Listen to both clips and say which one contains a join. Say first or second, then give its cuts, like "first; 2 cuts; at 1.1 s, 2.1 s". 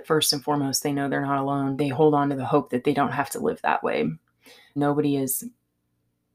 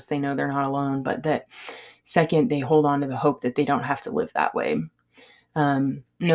first; 2 cuts; at 1.8 s, 4.8 s